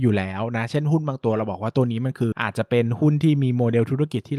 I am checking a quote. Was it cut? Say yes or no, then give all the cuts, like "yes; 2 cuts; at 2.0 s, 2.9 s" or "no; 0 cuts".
yes; 1 cut; at 2.3 s